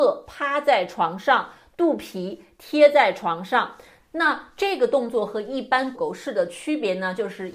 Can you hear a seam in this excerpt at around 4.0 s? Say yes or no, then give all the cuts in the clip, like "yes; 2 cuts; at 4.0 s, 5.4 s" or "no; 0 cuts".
yes; 2 cuts; at 4.0 s, 5.9 s